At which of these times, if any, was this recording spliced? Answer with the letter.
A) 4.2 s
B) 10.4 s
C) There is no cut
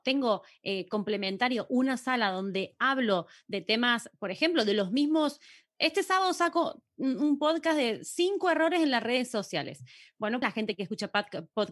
B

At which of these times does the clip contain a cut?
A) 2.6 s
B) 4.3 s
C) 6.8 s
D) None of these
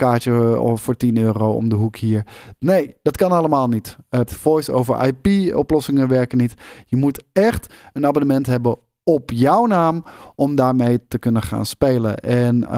B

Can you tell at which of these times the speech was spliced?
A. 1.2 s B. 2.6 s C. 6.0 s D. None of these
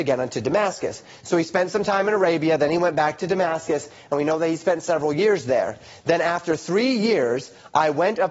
D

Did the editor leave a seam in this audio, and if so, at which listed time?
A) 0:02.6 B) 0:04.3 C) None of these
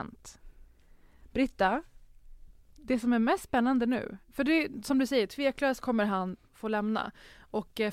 C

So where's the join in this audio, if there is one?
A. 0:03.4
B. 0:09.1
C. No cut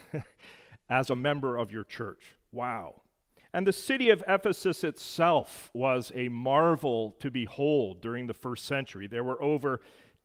A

